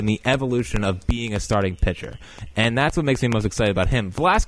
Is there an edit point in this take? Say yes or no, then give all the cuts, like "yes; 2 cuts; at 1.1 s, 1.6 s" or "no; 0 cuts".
no; 0 cuts